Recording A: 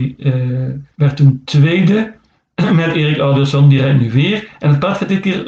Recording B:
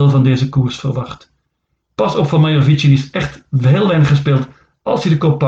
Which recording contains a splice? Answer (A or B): A